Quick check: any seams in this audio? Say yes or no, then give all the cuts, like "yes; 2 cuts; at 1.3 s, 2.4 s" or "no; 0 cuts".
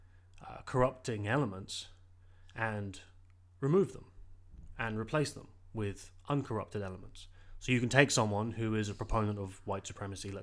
no; 0 cuts